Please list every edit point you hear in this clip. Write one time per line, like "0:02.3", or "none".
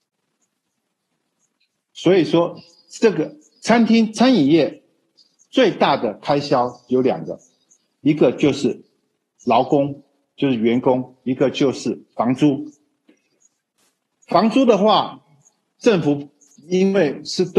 none